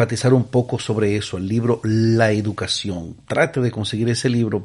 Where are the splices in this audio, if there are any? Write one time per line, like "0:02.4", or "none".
none